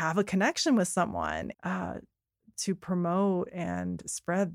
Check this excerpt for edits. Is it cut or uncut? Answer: cut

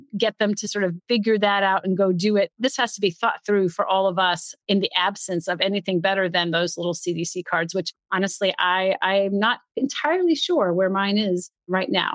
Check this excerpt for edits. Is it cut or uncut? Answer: cut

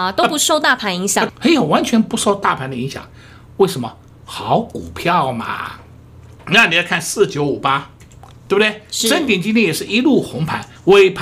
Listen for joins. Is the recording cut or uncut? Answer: cut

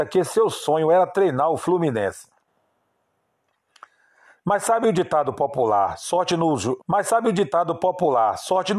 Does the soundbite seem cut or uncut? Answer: cut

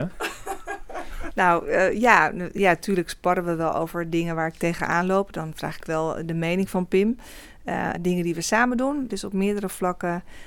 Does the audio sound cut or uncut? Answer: cut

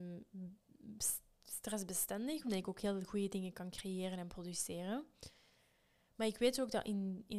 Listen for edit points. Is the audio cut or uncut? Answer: cut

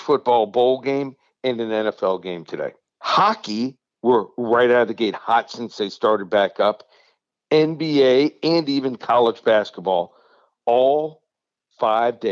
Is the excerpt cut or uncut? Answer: cut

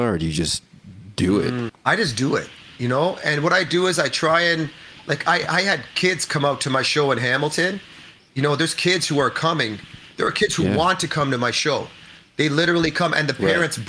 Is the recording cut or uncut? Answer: cut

